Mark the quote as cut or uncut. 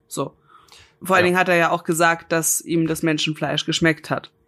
cut